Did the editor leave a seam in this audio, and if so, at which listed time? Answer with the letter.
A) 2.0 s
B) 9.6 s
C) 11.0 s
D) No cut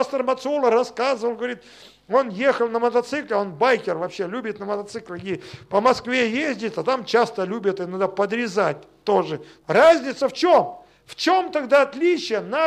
B